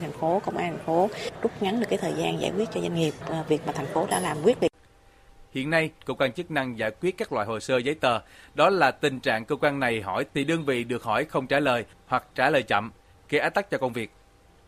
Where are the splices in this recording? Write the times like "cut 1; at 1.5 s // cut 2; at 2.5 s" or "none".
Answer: cut 1; at 6.0 s